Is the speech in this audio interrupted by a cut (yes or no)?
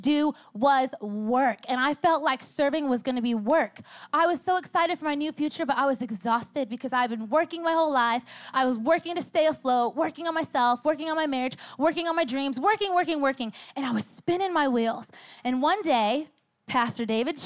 no